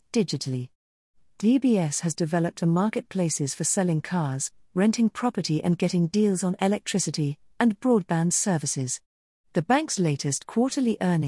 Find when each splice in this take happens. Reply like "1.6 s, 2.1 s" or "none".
7.5 s

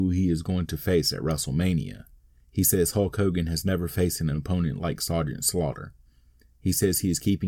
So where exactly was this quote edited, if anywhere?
none

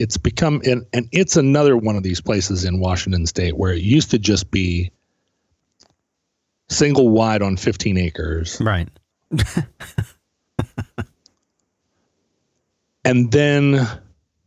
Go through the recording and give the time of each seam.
9.3 s

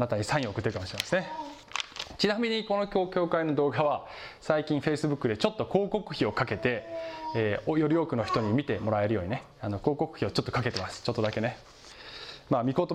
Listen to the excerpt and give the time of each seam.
9.5 s

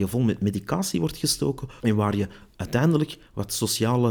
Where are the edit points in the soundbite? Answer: 1.8 s

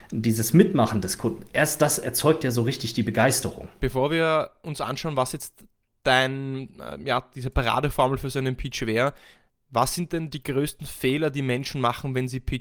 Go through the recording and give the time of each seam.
3.8 s

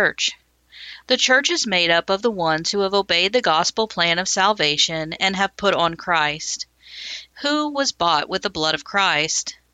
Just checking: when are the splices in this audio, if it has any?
1.0 s, 7.3 s

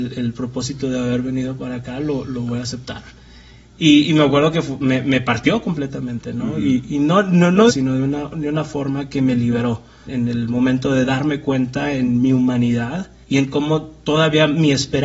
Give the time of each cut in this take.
7.7 s, 10.1 s, 13.2 s

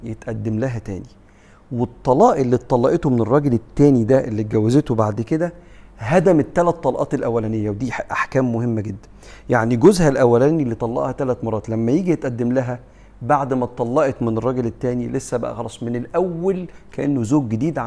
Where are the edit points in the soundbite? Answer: none

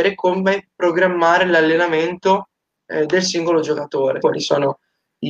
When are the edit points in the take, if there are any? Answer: 4.2 s

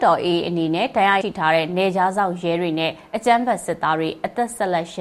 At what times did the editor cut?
1.2 s

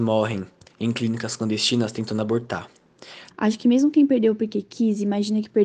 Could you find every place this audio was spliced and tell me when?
3.3 s

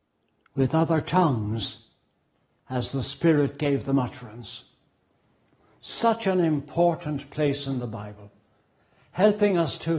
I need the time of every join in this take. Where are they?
none

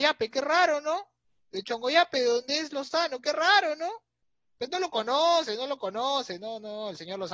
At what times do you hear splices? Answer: none

